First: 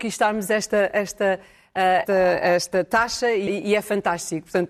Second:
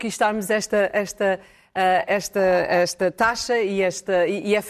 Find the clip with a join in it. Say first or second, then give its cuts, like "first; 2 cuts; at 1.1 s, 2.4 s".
first; 2 cuts; at 2.1 s, 3.5 s